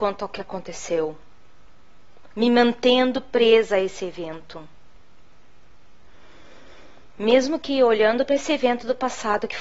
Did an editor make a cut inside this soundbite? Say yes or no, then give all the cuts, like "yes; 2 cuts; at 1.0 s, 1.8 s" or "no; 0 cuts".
no; 0 cuts